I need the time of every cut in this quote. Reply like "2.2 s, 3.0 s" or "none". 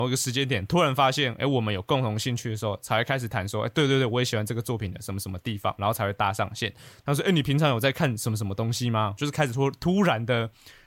7.0 s, 9.2 s